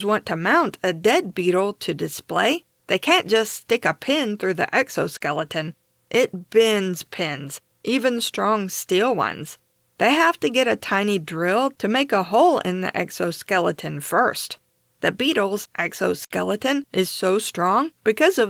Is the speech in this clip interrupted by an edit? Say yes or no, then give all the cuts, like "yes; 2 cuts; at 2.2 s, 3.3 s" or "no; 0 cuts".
no; 0 cuts